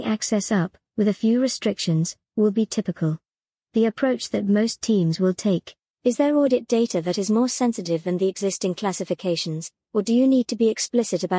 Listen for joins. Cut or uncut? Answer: cut